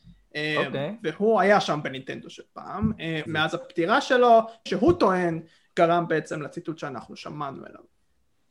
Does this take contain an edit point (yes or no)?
yes